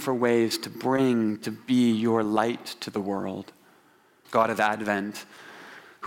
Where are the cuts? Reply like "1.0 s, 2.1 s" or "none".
4.2 s